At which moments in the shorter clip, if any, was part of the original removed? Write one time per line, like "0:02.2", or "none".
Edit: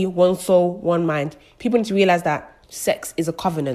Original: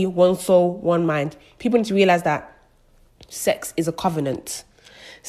0:02.6